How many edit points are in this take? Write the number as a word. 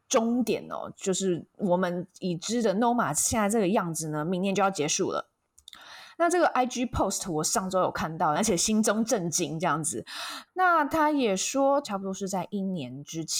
three